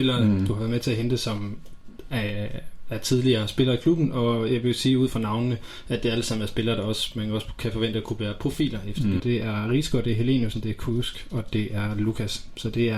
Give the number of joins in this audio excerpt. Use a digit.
2